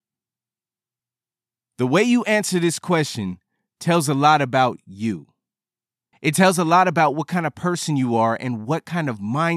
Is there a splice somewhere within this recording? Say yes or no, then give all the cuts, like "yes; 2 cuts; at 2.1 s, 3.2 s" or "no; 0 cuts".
no; 0 cuts